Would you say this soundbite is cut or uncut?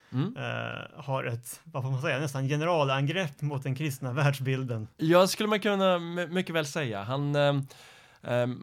uncut